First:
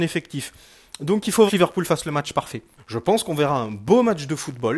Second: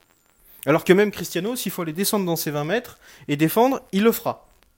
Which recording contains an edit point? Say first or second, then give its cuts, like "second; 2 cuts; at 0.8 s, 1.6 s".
first; 2 cuts; at 1.5 s, 2.8 s